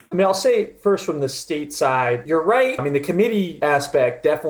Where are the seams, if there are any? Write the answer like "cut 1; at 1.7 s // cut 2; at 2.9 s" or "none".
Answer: cut 1; at 2.8 s